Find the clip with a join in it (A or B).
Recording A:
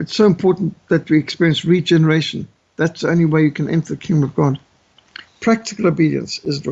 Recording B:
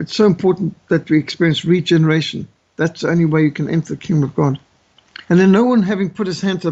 A